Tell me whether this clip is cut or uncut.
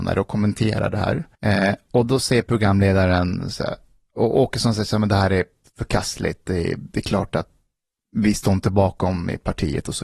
cut